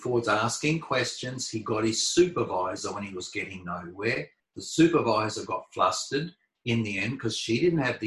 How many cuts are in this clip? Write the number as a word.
one